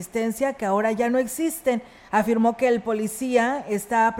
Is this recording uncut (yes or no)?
no